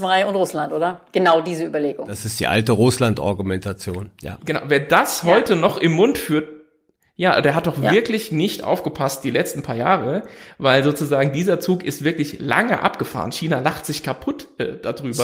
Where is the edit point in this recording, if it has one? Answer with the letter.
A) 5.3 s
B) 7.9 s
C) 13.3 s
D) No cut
D